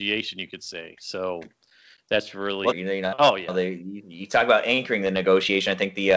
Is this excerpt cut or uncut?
cut